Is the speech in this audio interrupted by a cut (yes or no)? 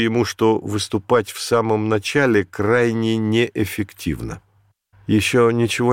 no